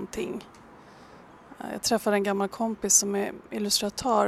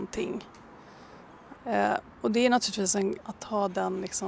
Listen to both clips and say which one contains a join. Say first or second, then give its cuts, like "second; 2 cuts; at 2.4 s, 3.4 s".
second; 2 cuts; at 1.6 s, 3.2 s